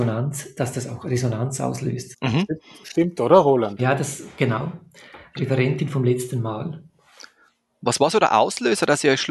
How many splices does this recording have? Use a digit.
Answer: 1